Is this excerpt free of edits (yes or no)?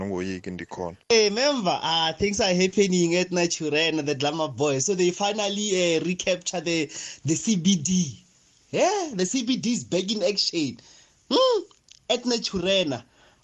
no